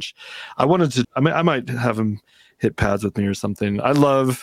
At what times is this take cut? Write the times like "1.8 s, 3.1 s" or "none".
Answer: 1.0 s